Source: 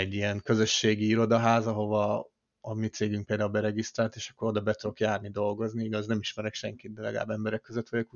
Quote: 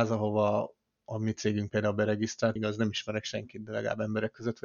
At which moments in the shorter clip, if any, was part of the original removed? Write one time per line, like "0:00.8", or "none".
0:02.6